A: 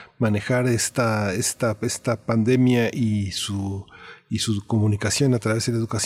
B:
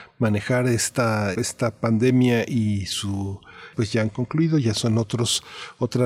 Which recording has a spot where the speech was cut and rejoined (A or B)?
B